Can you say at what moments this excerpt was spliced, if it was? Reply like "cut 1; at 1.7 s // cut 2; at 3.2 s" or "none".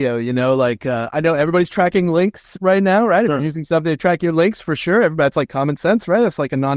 none

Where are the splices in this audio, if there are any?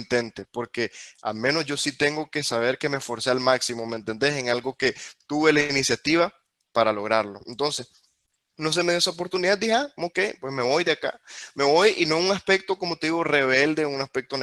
none

